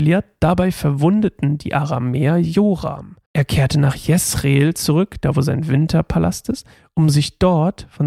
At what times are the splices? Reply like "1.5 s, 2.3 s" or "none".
3.3 s